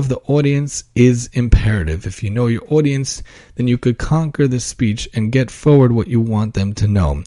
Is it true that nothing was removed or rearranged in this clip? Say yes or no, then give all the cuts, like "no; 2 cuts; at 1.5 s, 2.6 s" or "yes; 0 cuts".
yes; 0 cuts